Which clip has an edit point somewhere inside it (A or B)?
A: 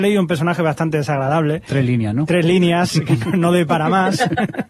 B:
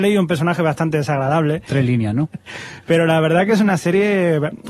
B